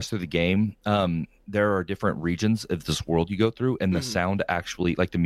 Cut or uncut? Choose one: uncut